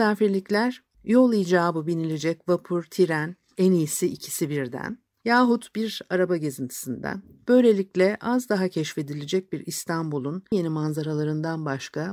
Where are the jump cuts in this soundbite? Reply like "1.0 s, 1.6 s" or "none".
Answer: 10.5 s